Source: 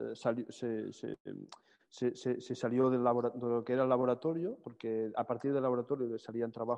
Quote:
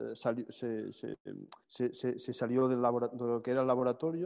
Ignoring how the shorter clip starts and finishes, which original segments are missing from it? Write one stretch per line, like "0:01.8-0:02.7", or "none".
0:01.6-0:01.8